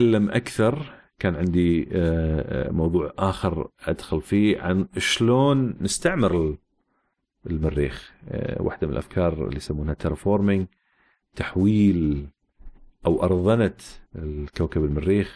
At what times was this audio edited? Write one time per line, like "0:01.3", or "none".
0:14.1